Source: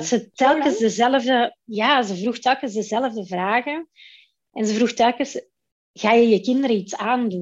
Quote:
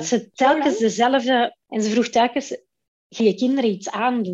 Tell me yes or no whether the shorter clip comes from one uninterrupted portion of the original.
no